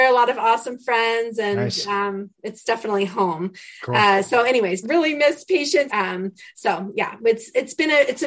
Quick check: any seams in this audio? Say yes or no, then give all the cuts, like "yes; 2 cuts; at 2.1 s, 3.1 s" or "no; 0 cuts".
yes; 2 cuts; at 4.8 s, 5.9 s